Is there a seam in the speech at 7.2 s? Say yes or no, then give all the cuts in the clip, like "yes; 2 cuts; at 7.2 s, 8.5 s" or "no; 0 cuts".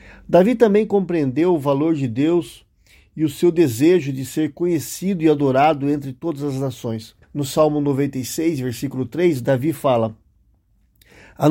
yes; 1 cut; at 7.2 s